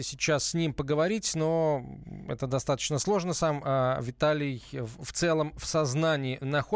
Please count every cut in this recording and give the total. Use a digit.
0